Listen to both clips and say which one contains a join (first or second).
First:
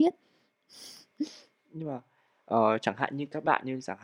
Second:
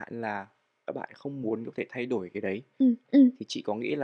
second